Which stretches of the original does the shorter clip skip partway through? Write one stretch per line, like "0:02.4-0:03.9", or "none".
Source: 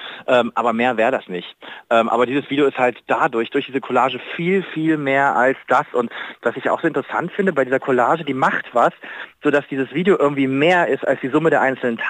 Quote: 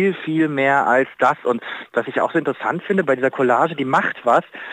none